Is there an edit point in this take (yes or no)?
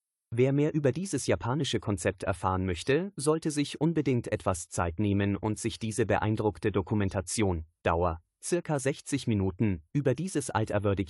no